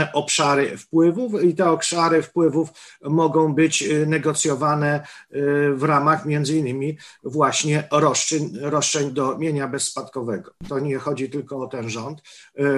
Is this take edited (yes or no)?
yes